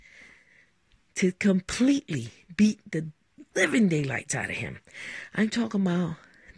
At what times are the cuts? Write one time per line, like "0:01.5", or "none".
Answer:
none